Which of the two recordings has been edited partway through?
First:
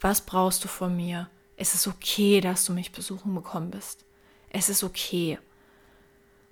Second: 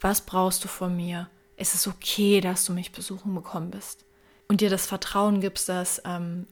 second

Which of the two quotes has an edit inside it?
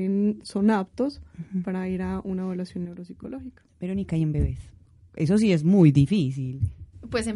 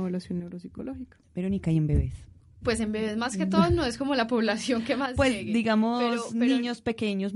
second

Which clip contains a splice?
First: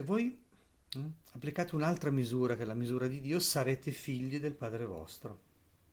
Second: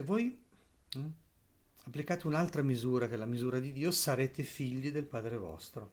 first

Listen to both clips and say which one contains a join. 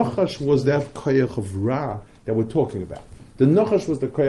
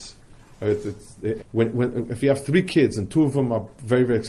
second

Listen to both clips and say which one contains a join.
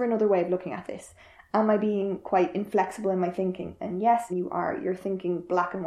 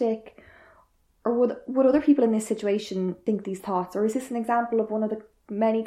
first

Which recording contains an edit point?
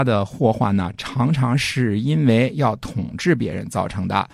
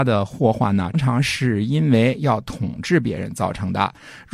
second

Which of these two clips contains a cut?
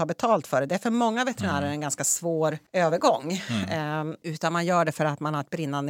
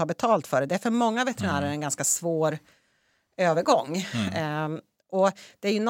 first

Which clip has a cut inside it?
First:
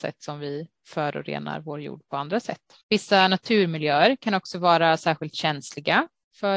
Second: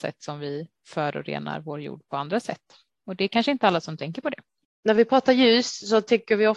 first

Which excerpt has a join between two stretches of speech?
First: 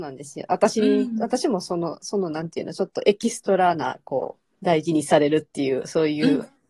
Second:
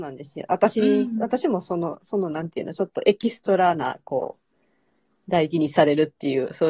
first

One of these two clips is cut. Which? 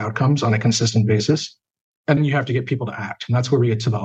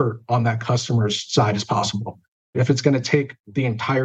first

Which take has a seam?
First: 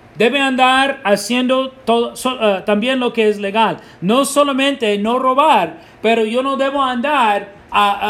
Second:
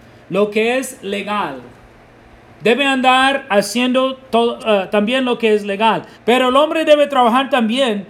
second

